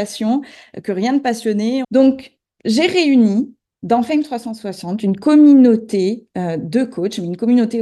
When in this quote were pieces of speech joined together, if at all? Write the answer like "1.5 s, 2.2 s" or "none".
1.8 s